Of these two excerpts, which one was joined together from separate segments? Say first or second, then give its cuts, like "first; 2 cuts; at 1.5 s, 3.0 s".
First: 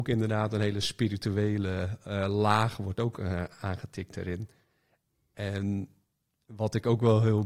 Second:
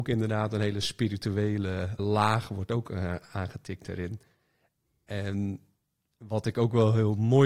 second; 1 cut; at 2.0 s